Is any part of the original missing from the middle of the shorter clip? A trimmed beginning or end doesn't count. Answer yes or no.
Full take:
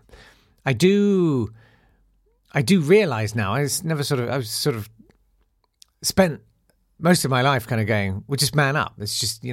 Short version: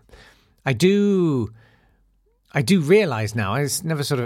no